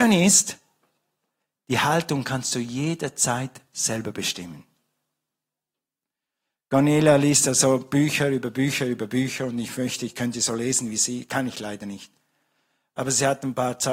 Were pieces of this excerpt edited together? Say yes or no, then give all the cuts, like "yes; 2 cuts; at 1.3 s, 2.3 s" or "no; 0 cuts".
no; 0 cuts